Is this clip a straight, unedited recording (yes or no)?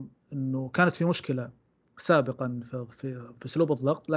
yes